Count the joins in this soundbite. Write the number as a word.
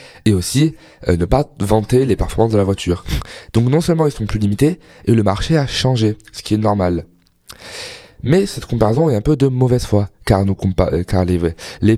zero